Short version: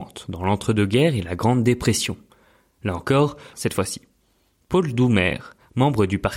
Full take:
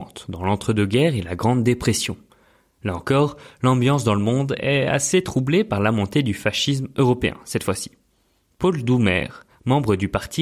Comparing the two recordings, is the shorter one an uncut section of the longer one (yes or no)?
no